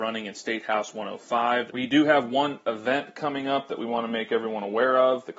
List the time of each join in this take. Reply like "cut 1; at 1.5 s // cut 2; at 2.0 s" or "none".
cut 1; at 1.7 s